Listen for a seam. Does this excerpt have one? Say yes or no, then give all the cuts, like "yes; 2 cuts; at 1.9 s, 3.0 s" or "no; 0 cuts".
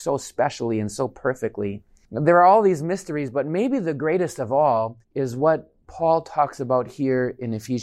yes; 2 cuts; at 2.0 s, 5.0 s